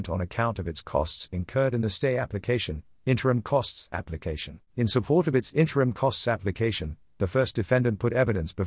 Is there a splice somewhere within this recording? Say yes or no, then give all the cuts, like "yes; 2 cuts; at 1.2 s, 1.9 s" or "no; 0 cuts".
yes; 1 cut; at 4.7 s